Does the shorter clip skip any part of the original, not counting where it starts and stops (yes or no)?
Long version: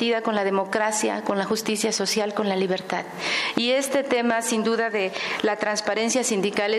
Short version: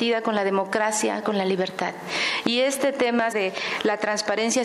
yes